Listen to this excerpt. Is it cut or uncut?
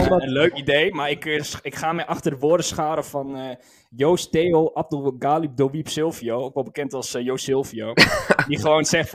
uncut